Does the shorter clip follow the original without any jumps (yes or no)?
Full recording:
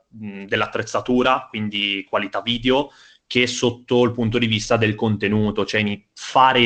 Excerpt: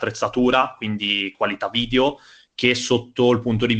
yes